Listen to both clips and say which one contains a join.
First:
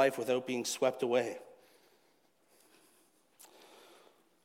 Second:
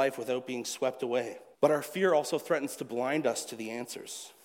second; 1 cut; at 1.5 s

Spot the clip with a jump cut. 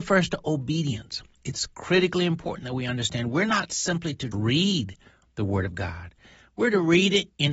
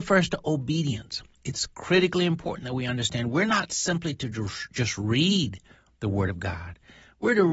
first; 1 cut; at 4.3 s

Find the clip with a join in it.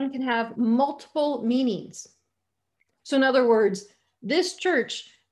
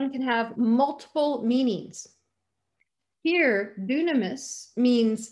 first; 1 cut; at 2.9 s

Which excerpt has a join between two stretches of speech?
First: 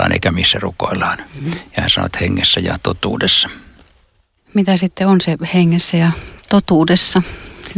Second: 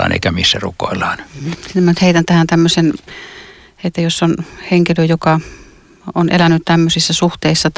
second; 1 cut; at 1.5 s

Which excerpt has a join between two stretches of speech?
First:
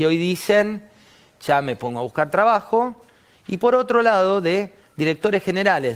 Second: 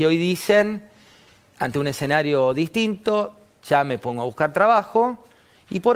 first; 1 cut; at 1.3 s

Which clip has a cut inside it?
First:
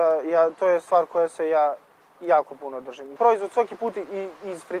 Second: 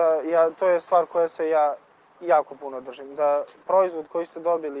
first; 1 cut; at 3.2 s

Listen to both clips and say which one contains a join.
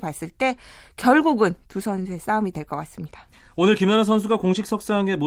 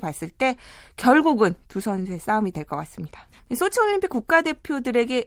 second; 1 cut; at 3.4 s

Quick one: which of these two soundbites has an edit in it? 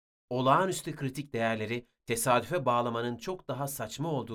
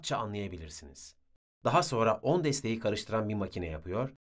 second; 1 cut; at 1.4 s

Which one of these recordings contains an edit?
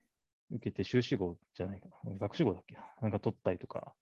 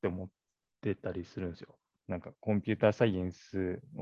second; 1 cut; at 2.0 s

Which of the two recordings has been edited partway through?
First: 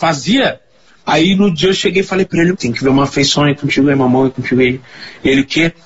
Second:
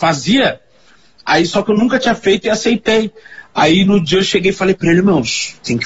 first; 2 cuts; at 1.0 s, 2.5 s

